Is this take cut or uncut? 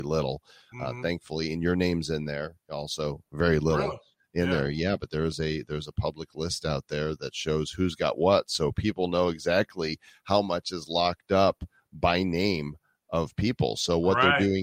uncut